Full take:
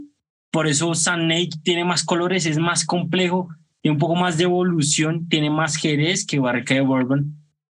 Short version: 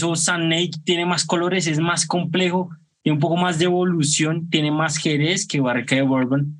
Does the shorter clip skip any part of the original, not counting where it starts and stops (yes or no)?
no